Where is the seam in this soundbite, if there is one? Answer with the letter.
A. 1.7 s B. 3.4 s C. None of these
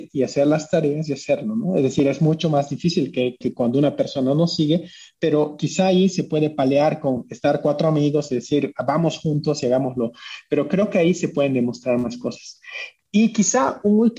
B